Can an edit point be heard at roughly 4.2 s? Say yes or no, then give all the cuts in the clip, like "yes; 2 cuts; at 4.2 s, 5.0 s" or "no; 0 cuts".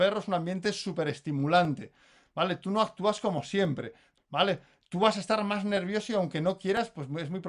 yes; 1 cut; at 4.2 s